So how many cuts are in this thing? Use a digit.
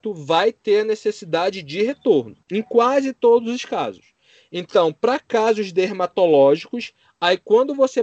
1